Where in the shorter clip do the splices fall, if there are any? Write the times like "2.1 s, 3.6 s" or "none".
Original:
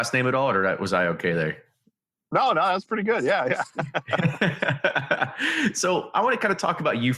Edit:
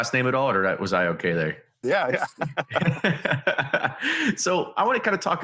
1.8 s